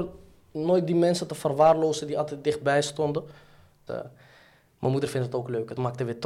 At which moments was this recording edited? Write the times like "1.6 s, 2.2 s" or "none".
3.9 s